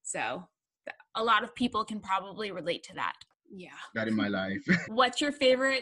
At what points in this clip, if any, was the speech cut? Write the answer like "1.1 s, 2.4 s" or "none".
3.3 s, 4.8 s